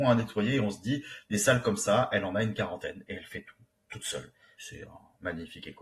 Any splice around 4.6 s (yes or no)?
yes